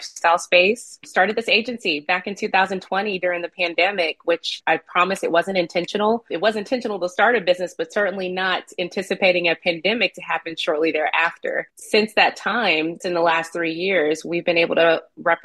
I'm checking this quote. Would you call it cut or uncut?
cut